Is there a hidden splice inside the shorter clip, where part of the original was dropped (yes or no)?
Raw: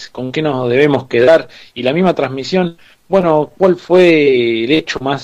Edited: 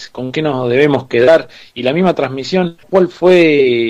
yes